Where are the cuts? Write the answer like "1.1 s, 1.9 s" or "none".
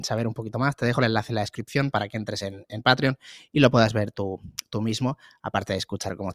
none